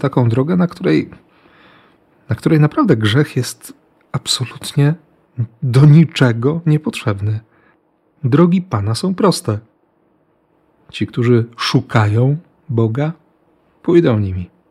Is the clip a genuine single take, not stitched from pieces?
yes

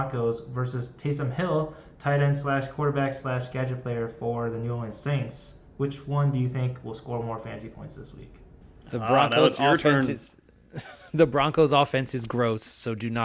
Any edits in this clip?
no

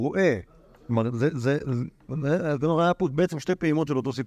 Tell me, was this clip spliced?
no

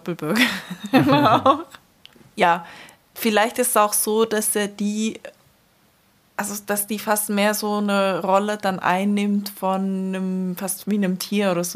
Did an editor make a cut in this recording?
no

